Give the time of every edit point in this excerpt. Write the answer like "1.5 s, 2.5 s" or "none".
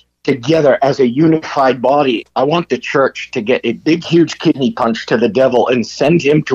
2.2 s, 4.0 s